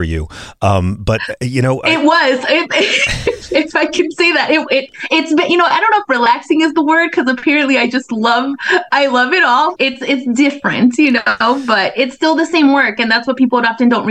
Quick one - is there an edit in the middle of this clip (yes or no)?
yes